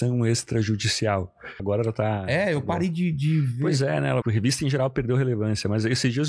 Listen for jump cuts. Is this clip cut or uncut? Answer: cut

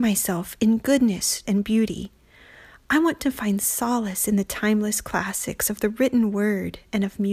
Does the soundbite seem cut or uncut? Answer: cut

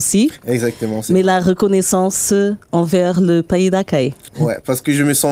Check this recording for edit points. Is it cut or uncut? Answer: uncut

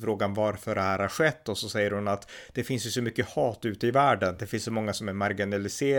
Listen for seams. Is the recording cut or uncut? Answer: uncut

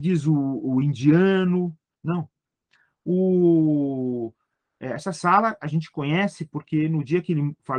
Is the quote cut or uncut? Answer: cut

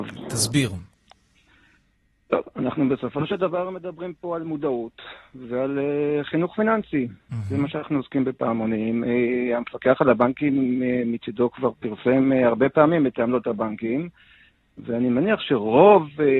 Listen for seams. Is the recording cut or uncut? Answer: uncut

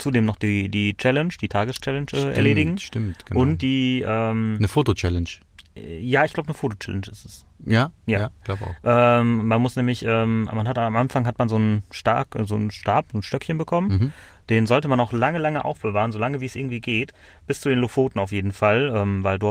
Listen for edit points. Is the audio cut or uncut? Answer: uncut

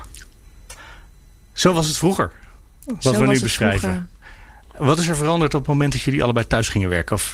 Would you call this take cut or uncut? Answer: uncut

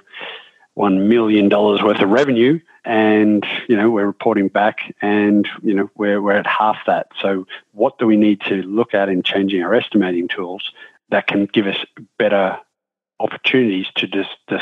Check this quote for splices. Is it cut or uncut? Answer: uncut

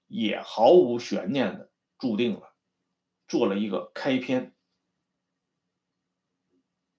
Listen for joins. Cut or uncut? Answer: cut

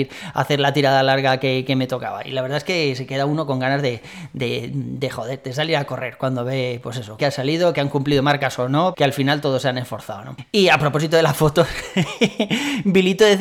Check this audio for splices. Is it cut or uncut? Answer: cut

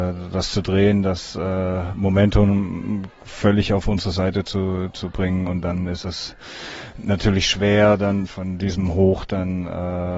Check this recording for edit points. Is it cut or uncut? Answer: uncut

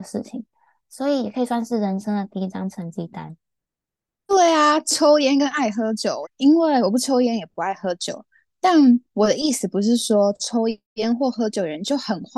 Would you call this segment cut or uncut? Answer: cut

